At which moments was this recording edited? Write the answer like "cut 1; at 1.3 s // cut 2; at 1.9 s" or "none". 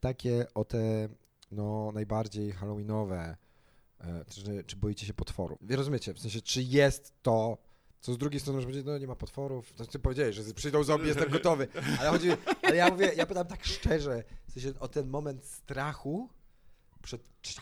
cut 1; at 5.6 s